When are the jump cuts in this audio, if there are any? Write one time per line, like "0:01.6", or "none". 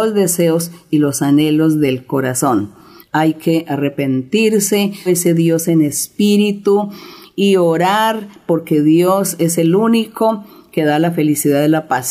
0:03.0
0:05.1